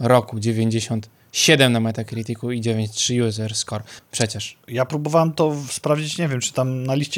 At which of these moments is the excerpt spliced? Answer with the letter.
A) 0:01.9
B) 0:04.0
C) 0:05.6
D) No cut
B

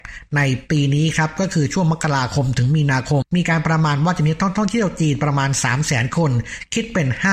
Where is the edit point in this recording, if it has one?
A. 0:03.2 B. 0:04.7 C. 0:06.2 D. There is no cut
A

